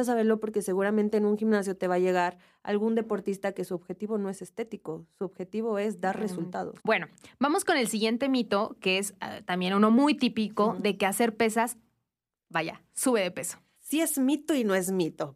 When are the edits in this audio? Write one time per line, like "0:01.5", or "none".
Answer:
0:06.8
0:13.8